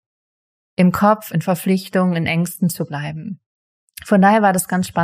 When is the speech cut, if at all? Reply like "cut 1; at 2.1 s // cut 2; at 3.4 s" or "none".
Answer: none